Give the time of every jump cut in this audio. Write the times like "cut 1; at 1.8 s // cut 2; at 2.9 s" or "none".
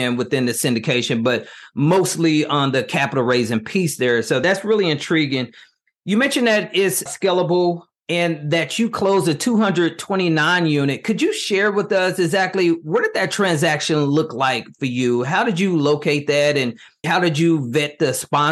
cut 1; at 7.1 s // cut 2; at 17.0 s